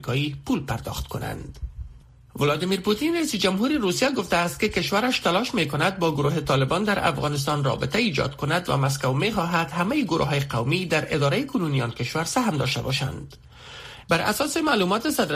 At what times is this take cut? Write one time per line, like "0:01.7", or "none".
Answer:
0:14.0